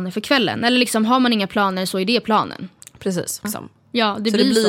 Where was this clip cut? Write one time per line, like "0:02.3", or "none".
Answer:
0:03.4